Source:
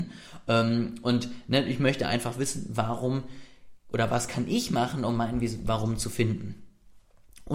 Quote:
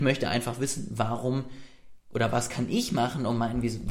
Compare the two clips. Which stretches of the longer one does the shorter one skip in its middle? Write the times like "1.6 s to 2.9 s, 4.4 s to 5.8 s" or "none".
none